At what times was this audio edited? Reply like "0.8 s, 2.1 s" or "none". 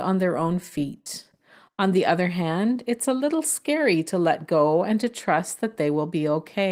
none